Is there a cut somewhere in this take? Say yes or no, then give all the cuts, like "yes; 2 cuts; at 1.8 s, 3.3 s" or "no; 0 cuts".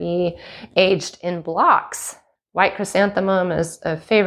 yes; 1 cut; at 2.4 s